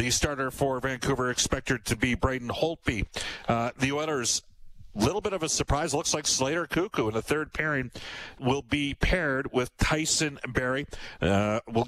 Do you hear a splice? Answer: yes; 1 cut; at 8.4 s

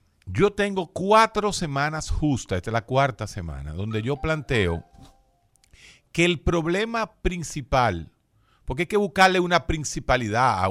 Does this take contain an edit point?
no; 0 cuts

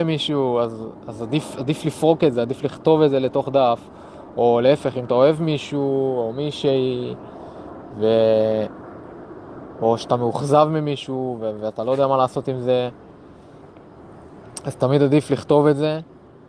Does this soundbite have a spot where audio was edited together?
no; 0 cuts

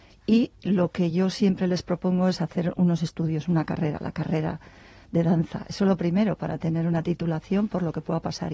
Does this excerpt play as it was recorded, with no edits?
yes; 0 cuts

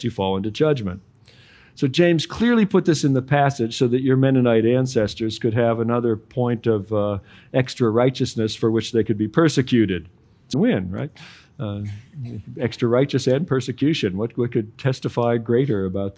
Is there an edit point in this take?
yes; 1 cut; at 10.5 s

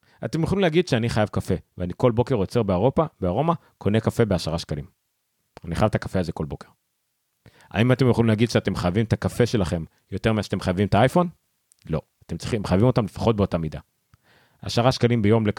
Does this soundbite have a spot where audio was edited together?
no; 0 cuts

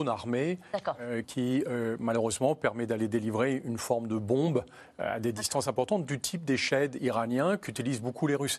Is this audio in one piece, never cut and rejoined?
no; 1 cut; at 1.2 s

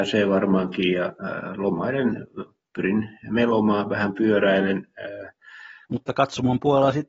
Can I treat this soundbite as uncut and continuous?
no; 1 cut; at 5.8 s

